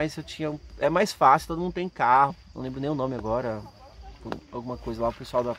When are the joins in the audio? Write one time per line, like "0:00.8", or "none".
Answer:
0:02.3